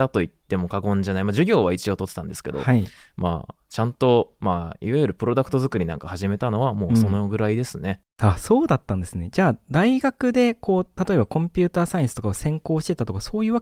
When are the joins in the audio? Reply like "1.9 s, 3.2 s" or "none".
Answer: none